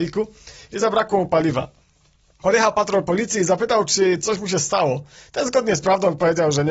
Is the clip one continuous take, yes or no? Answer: yes